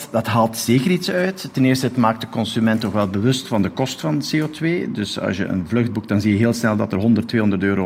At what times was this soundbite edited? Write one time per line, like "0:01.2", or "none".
none